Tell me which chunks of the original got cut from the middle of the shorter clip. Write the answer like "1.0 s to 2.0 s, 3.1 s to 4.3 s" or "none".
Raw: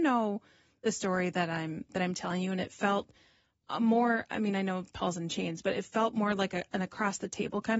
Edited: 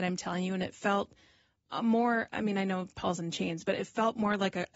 none